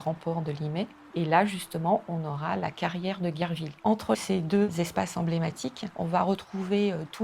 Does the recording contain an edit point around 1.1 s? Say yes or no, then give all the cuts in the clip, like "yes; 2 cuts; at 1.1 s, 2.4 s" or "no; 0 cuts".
yes; 2 cuts; at 1.1 s, 3.8 s